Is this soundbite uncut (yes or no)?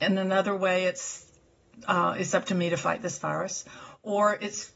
yes